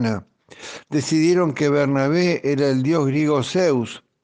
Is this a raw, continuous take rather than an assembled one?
yes; 0 cuts

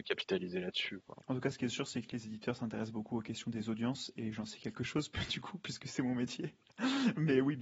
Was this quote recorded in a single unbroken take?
yes; 0 cuts

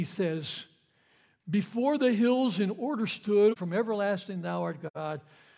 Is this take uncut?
no; 1 cut; at 3.6 s

